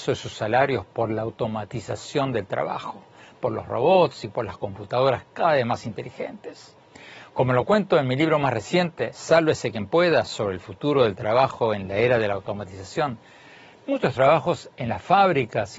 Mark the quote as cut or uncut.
uncut